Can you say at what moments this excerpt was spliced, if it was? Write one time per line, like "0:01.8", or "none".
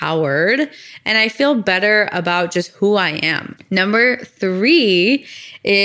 0:03.6